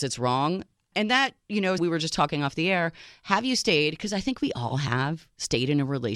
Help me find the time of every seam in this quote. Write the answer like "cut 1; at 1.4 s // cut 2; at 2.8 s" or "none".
cut 1; at 1.8 s